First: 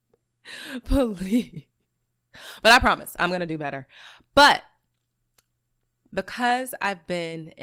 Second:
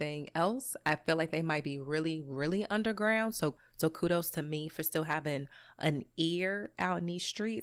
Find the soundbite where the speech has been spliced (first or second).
first